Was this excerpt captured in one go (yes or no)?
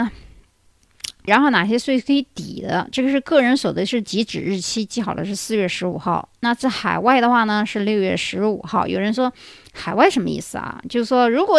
no